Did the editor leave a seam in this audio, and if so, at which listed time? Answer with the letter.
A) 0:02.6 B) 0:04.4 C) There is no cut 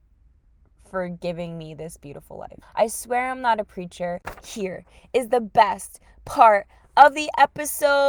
A